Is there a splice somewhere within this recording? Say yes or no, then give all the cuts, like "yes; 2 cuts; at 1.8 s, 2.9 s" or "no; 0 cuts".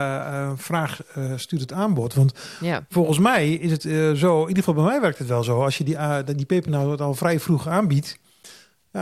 no; 0 cuts